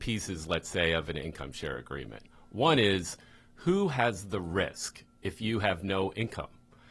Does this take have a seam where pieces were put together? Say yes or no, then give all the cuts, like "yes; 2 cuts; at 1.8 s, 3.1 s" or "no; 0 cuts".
no; 0 cuts